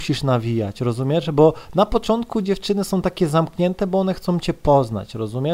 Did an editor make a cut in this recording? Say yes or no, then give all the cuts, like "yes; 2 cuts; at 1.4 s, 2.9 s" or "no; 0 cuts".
no; 0 cuts